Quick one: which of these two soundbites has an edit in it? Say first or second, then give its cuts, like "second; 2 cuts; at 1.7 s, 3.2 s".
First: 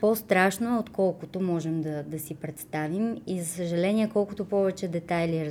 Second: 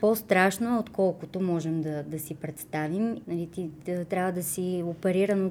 second; 1 cut; at 3.2 s